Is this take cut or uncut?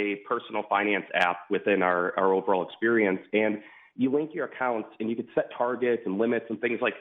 uncut